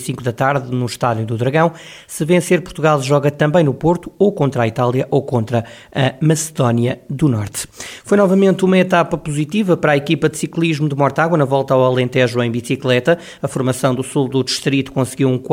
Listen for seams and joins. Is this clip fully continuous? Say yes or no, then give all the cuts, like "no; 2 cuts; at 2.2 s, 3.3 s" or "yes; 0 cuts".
yes; 0 cuts